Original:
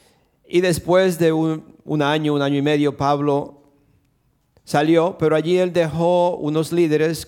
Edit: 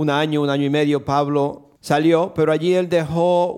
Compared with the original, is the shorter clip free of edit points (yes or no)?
no